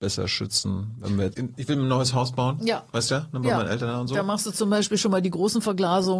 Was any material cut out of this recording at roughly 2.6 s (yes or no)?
no